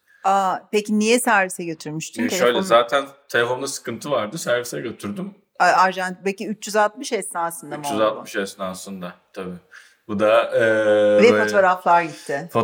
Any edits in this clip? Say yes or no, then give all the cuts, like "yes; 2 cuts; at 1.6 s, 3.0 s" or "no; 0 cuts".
no; 0 cuts